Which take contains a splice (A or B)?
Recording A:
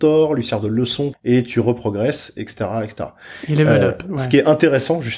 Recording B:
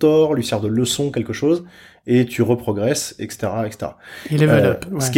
A